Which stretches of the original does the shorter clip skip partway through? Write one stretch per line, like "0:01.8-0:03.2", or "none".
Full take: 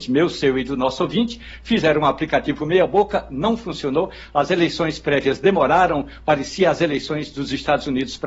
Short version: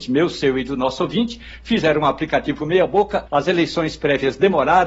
0:03.3-0:04.3